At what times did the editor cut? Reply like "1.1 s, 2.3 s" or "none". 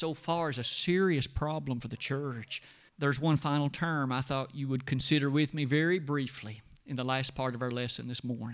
2.9 s